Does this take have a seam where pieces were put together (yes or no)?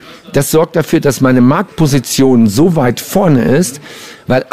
no